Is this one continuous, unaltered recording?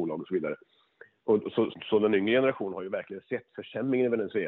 no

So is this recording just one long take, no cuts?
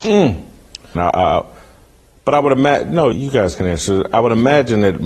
no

